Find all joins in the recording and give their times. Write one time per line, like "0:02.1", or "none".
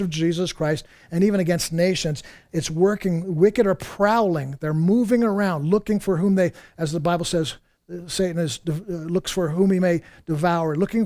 none